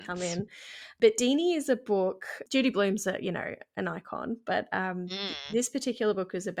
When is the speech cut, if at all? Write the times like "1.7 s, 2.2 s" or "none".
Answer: none